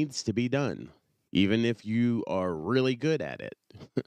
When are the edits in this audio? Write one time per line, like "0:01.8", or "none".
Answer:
0:01.3